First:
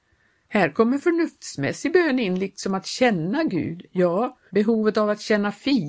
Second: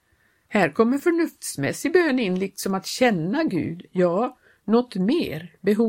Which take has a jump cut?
first; 1 cut; at 4.5 s

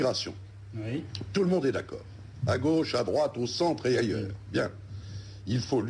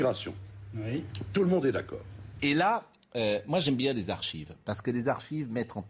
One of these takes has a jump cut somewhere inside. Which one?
second; 1 cut; at 2.4 s

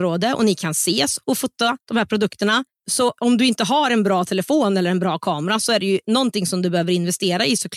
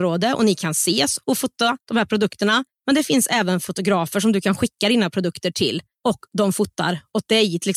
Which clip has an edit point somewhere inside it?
first; 1 cut; at 2.7 s

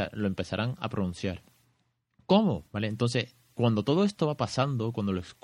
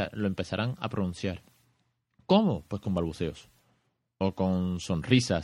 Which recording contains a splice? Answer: first; 1 cut; at 2.7 s

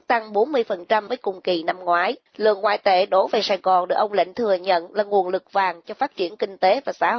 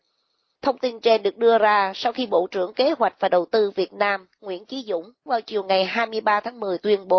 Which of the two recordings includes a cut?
first; 2 cuts; at 1.1 s, 2.3 s

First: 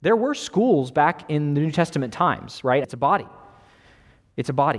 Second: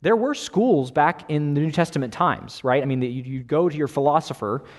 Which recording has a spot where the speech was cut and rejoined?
first; 1 cut; at 2.8 s

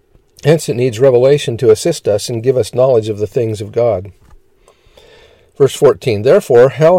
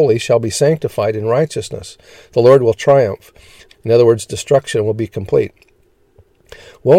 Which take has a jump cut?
second; 1 cut; at 3.7 s

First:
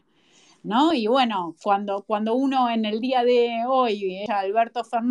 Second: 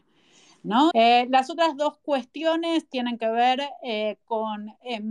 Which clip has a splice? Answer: second; 1 cut; at 0.9 s

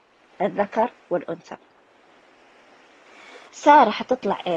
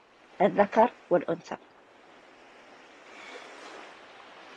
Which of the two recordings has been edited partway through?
first; 1 cut; at 3.5 s

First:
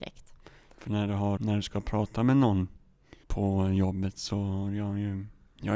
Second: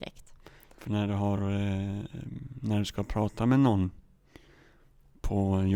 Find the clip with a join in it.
first; 2 cuts; at 1.4 s, 3.2 s

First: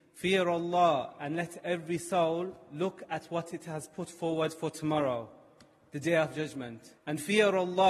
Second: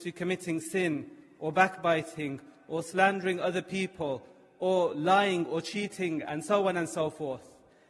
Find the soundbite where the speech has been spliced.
first; 1 cut; at 7.0 s

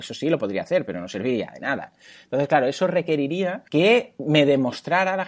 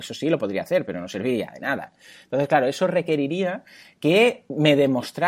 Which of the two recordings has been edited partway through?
first; 1 cut; at 3.7 s

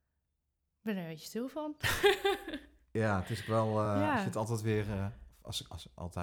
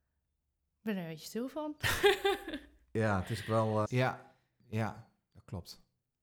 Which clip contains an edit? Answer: second; 1 cut; at 3.9 s

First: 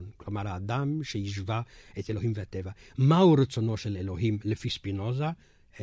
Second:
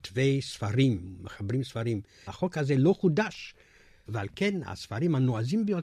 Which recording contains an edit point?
second; 2 cuts; at 2.3 s, 4.1 s

